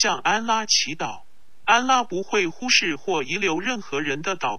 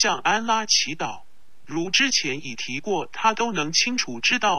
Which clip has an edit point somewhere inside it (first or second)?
second